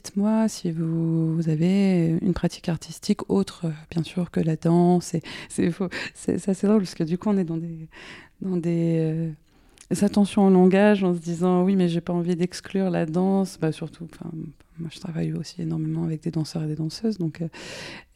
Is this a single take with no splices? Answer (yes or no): yes